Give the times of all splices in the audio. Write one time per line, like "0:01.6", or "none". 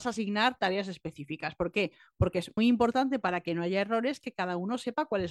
0:02.6